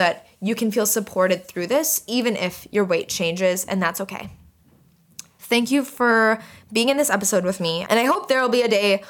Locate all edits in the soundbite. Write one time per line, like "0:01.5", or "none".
0:07.9